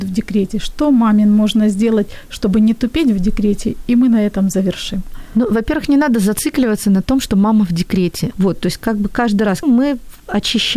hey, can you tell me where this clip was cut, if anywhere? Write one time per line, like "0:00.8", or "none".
0:08.3
0:09.6